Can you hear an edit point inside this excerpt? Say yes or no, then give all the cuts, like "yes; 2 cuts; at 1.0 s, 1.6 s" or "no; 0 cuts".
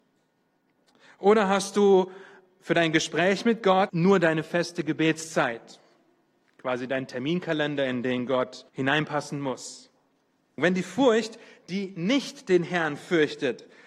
yes; 2 cuts; at 3.9 s, 8.7 s